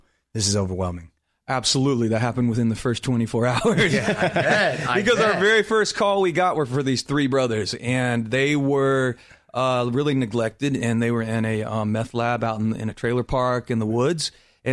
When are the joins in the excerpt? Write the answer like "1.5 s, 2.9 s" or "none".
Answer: none